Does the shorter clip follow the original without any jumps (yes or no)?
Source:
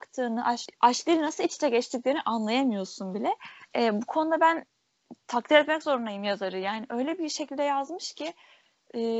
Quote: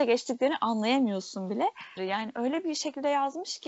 no